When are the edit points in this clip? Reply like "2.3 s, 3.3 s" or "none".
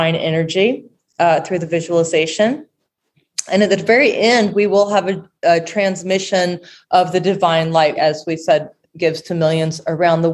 8.0 s